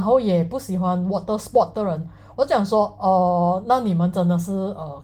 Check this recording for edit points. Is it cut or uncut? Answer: uncut